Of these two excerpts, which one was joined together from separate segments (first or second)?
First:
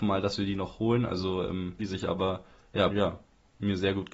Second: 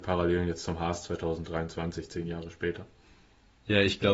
first